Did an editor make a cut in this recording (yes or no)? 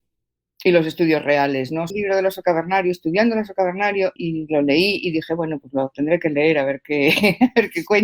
yes